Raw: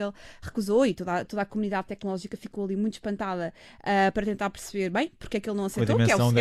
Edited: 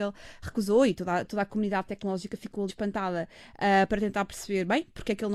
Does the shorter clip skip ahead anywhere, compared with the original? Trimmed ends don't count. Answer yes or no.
yes